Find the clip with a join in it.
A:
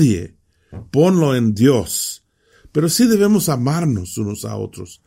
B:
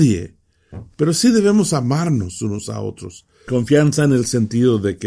B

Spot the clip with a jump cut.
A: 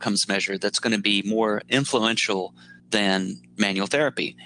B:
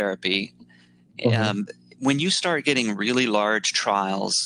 A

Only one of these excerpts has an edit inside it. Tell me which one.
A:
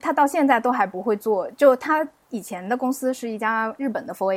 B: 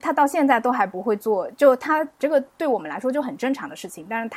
B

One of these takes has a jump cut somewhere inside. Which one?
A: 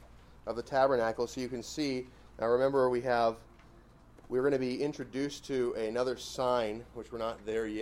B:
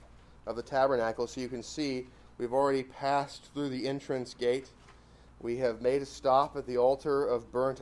A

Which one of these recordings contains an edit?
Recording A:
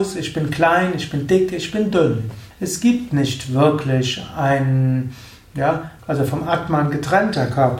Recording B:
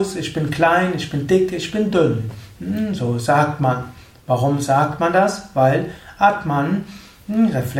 A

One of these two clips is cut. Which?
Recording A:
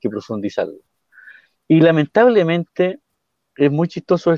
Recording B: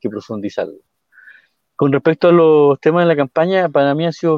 A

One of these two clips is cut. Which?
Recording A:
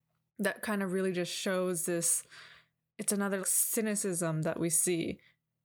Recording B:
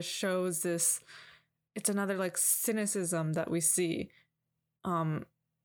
A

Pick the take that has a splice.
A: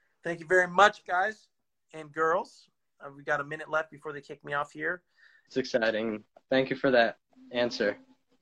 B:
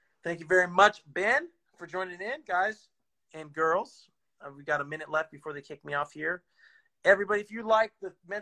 A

